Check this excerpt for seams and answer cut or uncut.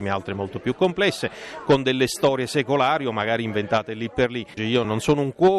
cut